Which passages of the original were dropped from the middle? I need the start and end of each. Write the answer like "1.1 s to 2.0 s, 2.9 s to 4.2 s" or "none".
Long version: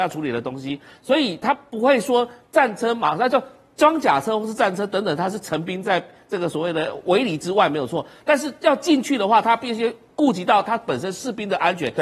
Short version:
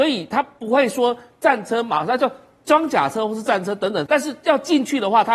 5.2 s to 8.2 s